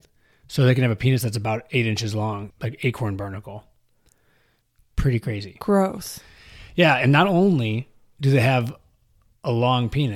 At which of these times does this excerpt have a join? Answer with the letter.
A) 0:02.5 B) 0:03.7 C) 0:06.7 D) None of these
A